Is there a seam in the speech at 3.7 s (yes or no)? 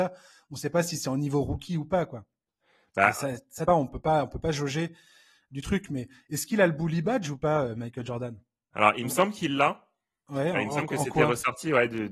yes